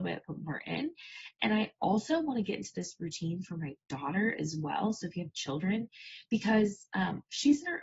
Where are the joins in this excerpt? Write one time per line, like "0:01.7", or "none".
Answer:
none